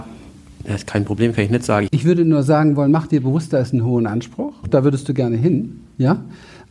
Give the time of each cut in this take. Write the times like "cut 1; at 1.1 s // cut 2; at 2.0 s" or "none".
cut 1; at 1.9 s // cut 2; at 4.6 s